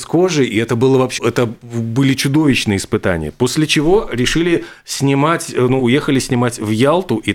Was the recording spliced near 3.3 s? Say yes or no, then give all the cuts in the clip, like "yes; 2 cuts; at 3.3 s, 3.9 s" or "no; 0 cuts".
no; 2 cuts; at 1.2 s, 5.8 s